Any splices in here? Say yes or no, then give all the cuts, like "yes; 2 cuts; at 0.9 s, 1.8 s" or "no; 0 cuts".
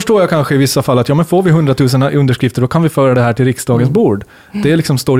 no; 0 cuts